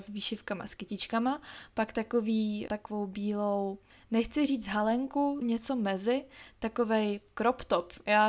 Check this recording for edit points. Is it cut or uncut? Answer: cut